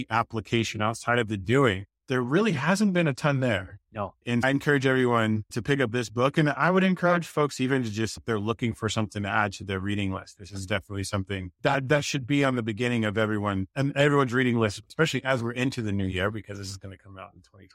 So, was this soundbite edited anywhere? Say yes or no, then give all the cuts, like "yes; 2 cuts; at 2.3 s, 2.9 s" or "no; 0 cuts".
no; 0 cuts